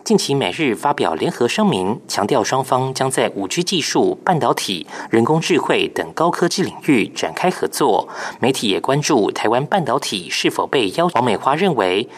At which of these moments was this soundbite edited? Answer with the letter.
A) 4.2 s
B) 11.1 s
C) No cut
B